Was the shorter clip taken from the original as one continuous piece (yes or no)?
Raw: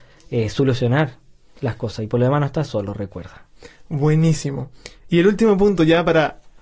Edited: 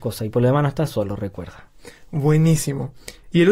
yes